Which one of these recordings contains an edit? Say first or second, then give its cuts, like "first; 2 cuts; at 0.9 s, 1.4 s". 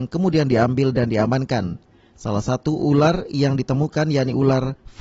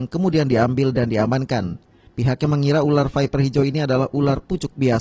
second; 1 cut; at 2.1 s